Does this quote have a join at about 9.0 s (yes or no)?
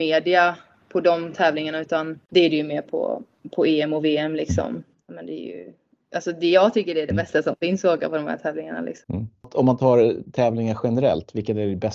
yes